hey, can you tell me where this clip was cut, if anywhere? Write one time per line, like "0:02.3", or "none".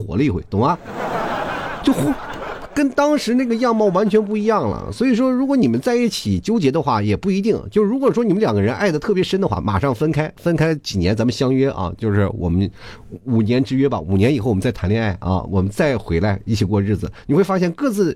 none